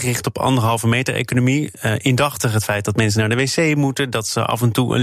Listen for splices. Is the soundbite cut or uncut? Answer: uncut